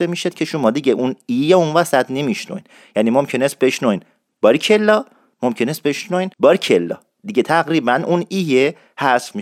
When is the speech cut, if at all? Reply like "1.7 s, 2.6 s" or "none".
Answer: 6.3 s